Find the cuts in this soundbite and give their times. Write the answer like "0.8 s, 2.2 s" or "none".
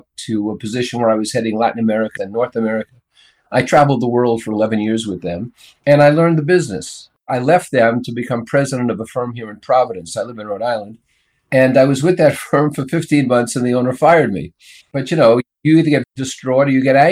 2.2 s, 14.8 s, 16.0 s